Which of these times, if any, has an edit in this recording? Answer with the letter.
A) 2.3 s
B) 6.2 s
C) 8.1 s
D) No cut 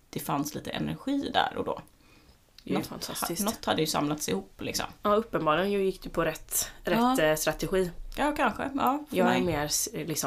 D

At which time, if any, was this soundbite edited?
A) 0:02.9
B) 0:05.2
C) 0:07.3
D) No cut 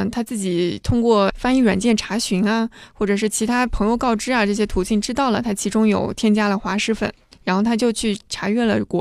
D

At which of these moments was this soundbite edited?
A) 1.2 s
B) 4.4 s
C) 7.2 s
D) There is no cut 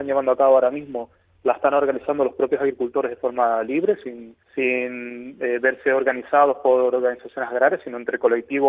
B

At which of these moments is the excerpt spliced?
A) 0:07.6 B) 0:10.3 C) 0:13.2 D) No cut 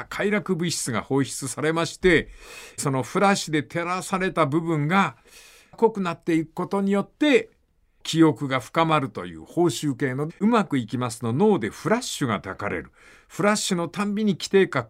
B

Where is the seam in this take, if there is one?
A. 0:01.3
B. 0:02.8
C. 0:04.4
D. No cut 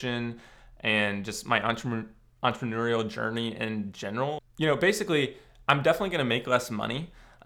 C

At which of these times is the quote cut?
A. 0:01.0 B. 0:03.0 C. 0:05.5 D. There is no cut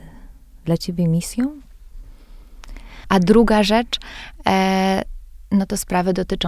B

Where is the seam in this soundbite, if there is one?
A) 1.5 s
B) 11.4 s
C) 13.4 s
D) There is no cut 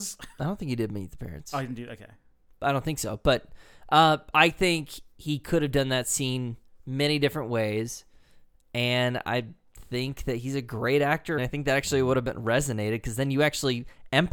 B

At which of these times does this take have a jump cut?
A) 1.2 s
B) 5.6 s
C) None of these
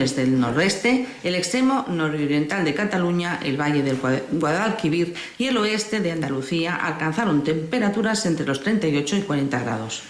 A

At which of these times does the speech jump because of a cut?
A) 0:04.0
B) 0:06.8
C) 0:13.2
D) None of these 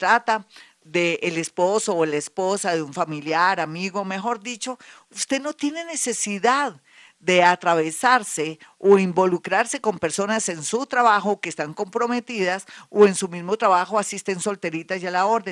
D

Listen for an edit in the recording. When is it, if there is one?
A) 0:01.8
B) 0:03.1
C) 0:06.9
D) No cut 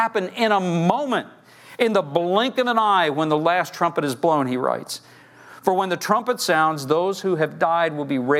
D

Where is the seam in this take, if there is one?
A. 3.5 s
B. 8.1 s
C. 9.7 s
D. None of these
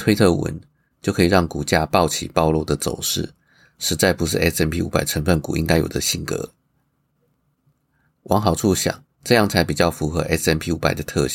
B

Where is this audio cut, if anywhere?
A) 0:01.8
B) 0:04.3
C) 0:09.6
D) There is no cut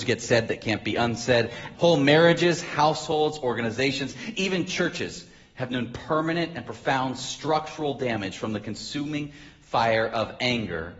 A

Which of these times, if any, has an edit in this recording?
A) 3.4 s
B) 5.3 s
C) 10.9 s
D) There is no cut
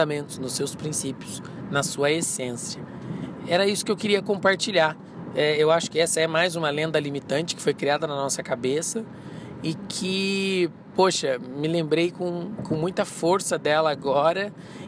D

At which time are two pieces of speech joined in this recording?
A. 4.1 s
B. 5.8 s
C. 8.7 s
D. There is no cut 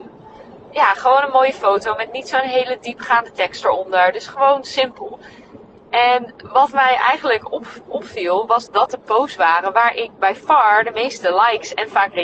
C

